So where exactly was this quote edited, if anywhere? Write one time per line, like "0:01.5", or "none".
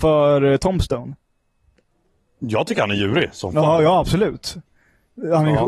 none